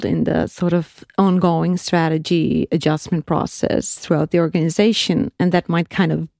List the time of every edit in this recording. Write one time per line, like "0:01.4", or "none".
none